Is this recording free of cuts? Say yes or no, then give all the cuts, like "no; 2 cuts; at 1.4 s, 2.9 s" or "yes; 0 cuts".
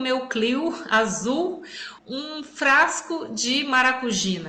no; 1 cut; at 2.0 s